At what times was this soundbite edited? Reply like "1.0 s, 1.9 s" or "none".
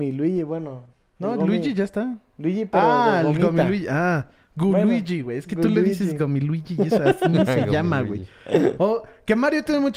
none